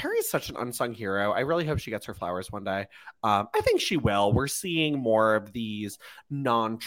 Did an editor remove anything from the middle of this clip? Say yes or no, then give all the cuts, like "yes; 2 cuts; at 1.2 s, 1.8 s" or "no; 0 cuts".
no; 0 cuts